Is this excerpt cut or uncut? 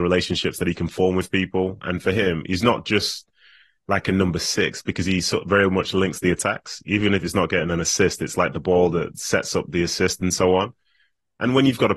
uncut